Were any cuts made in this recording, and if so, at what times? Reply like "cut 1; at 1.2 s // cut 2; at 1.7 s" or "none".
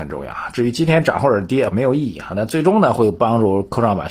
cut 1; at 1.7 s